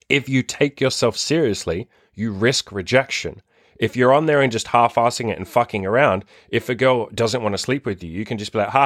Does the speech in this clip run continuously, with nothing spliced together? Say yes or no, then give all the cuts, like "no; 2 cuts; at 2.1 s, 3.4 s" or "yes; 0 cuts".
yes; 0 cuts